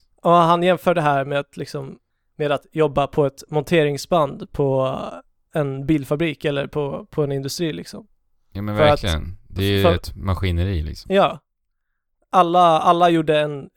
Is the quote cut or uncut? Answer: uncut